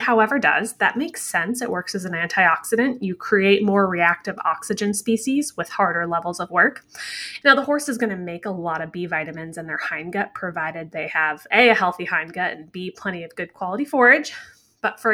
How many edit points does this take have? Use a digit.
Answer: 1